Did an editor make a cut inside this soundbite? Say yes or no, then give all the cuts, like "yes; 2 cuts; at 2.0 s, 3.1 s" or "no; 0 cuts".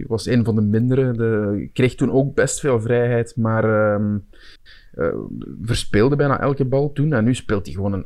no; 0 cuts